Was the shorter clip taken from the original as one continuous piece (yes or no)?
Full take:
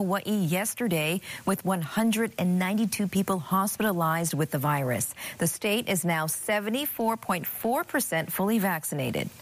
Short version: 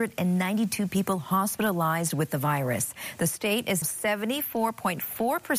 no